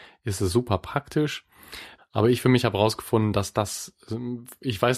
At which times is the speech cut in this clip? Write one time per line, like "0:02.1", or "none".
0:02.0